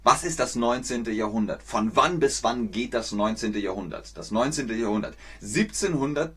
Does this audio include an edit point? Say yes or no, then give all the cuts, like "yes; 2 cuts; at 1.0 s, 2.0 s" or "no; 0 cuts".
no; 0 cuts